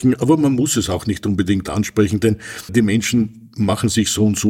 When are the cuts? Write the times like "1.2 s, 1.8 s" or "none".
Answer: 2.7 s